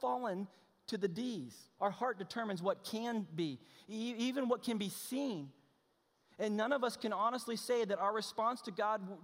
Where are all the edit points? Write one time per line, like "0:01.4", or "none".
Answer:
0:01.8